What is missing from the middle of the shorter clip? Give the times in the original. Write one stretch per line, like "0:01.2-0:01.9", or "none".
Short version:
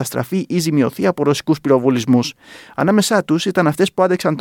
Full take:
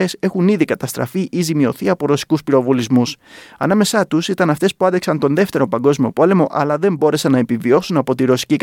none